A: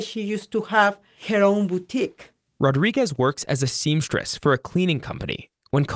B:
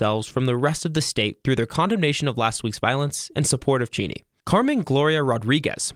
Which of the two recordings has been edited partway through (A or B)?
B